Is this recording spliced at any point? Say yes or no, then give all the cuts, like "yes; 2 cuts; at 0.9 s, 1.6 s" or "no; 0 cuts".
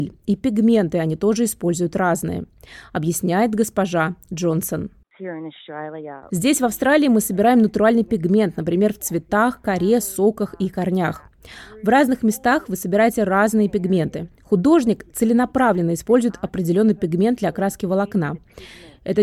no; 0 cuts